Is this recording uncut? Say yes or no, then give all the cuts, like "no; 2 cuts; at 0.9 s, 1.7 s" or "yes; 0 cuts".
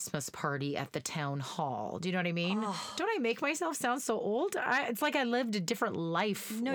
yes; 0 cuts